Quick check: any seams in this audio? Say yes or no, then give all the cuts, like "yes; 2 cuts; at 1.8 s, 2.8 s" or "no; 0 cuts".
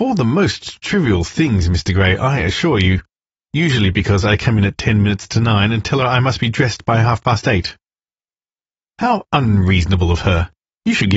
no; 0 cuts